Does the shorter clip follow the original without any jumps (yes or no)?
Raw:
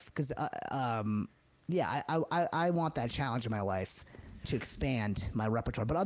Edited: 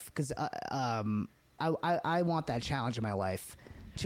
no